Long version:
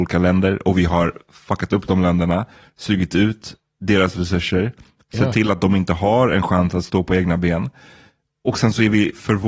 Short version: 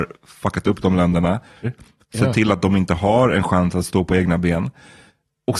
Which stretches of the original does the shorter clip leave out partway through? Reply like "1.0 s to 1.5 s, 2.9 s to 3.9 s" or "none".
2.7 s to 4.6 s